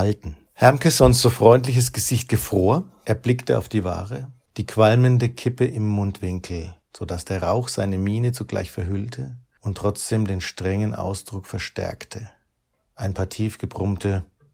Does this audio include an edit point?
no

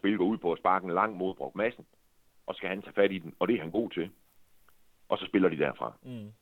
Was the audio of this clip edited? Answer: no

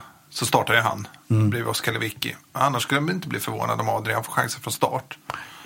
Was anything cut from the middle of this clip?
no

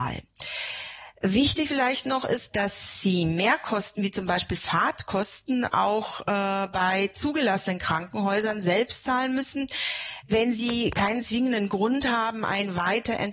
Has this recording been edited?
no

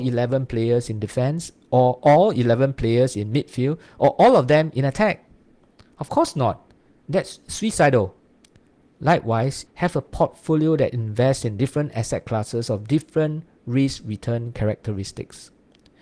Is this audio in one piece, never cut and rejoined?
no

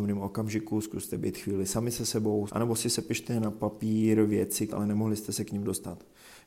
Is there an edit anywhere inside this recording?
yes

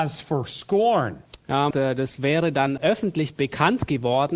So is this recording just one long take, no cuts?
no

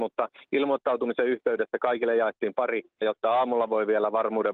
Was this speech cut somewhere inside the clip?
yes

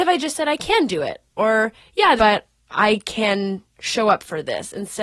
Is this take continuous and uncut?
no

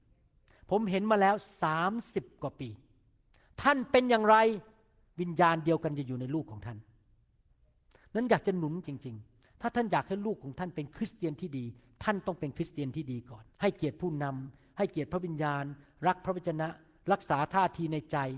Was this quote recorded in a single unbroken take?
no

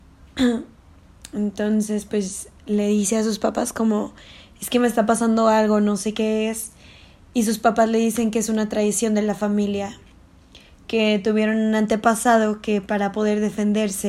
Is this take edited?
no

